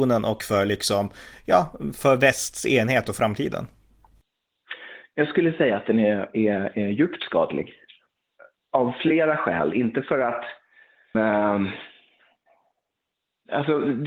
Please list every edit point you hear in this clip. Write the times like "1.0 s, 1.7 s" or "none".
11.1 s